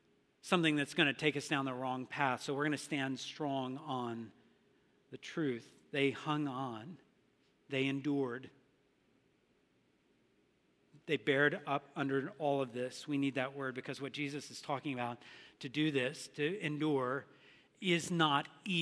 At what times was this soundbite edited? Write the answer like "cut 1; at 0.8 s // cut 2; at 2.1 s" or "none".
none